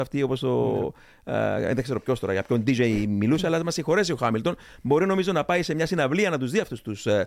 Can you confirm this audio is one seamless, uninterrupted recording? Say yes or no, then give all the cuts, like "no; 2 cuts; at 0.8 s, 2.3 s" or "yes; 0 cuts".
yes; 0 cuts